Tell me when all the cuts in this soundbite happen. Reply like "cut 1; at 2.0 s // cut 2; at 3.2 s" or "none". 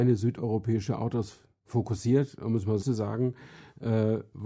cut 1; at 2.8 s

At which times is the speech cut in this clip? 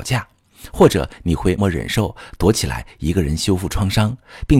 cut 1; at 1.6 s

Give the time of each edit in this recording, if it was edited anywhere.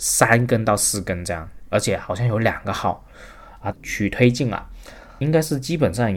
cut 1; at 3.7 s

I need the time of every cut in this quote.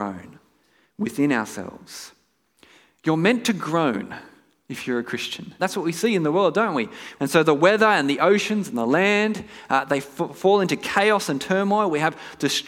cut 1; at 5.6 s // cut 2; at 7.2 s

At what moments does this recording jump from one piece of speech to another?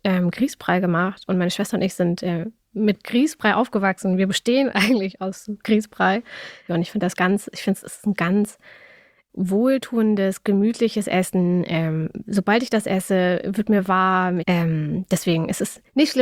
cut 1; at 6.7 s // cut 2; at 14.4 s

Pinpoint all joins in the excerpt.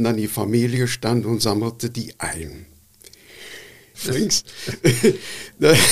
cut 1; at 3.9 s

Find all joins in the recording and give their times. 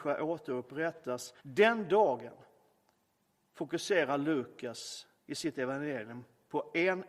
cut 1; at 1.4 s

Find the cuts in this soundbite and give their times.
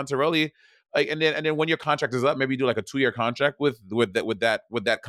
none

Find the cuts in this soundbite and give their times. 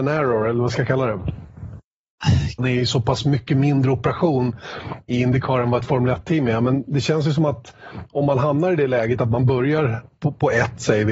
cut 1; at 2.6 s

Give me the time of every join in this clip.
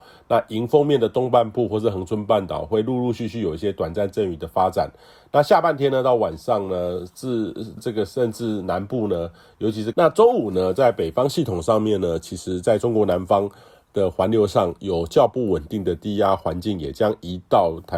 cut 1; at 7.8 s // cut 2; at 9.9 s

